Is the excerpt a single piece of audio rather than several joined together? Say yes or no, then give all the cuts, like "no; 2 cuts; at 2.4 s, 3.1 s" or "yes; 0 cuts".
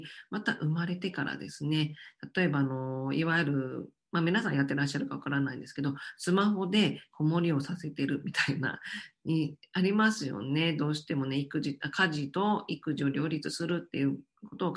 yes; 0 cuts